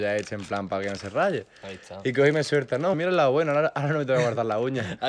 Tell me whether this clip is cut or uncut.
cut